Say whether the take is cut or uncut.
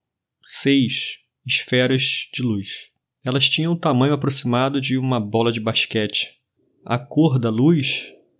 uncut